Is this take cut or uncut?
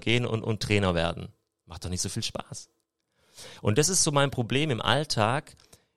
uncut